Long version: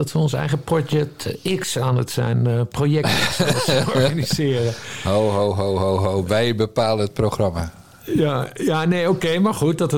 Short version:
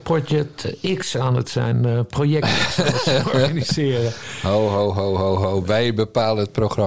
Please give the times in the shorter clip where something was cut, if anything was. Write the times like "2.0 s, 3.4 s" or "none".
none